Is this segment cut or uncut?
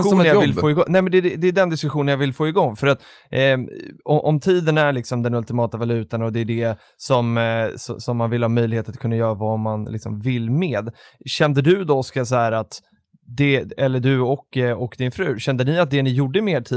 uncut